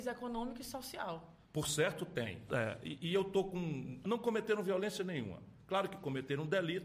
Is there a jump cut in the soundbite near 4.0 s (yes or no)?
yes